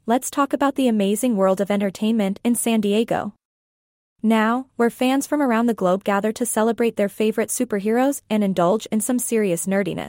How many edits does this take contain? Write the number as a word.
one